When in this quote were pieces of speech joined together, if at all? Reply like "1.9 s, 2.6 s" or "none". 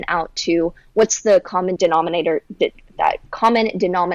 1.8 s